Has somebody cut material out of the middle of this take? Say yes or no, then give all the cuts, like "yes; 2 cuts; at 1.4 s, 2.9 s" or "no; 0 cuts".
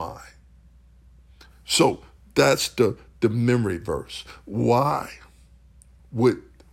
no; 0 cuts